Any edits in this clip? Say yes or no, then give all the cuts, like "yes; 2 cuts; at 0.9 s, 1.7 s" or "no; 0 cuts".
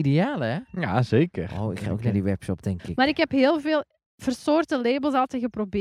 no; 0 cuts